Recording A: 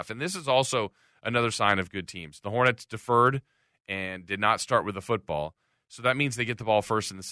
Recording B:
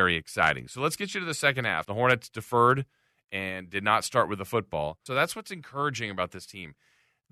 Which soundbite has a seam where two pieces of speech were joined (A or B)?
B